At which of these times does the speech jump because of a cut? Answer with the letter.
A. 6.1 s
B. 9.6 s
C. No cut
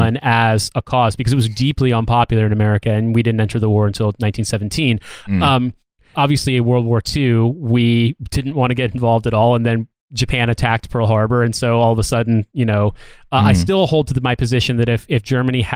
A